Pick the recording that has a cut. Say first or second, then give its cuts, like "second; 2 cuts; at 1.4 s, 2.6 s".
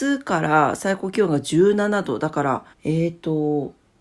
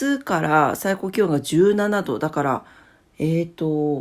first; 1 cut; at 2.7 s